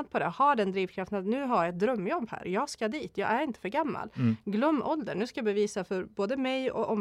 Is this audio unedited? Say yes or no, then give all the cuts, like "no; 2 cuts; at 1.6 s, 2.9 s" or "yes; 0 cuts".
yes; 0 cuts